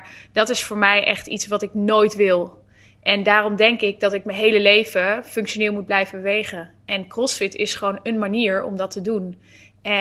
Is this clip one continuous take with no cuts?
yes; 0 cuts

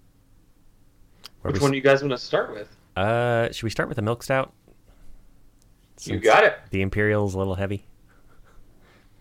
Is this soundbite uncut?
yes; 0 cuts

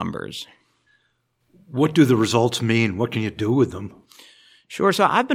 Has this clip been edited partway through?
no; 0 cuts

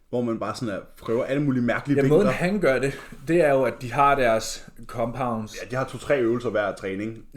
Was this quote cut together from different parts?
no; 0 cuts

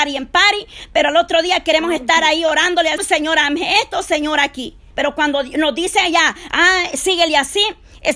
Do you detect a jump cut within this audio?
yes; 2 cuts; at 3.0 s, 4.9 s

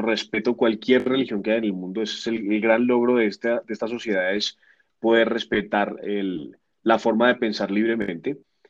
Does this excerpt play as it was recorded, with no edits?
yes; 0 cuts

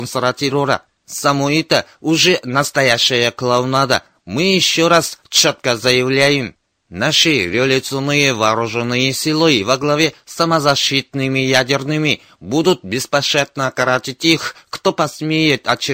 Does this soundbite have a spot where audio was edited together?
no; 0 cuts

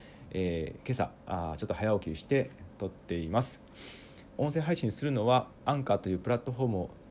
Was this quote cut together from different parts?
yes; 2 cuts; at 4.4 s, 5.6 s

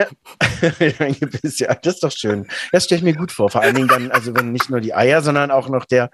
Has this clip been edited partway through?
no; 0 cuts

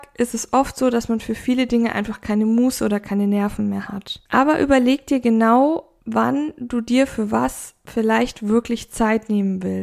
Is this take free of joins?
no; 1 cut; at 4.3 s

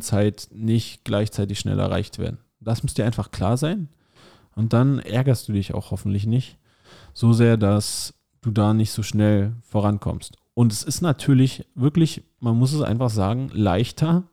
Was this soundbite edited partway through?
no; 0 cuts

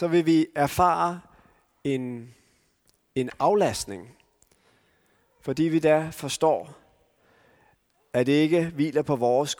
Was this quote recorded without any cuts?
yes; 0 cuts

